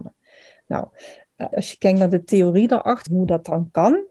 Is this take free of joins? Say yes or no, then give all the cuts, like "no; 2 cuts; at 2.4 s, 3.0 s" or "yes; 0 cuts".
no; 2 cuts; at 1.5 s, 3.1 s